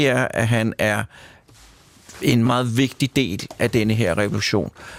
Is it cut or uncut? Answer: cut